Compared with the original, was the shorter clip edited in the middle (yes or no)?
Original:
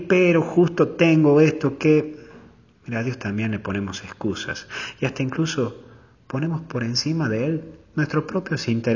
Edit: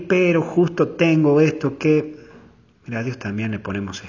no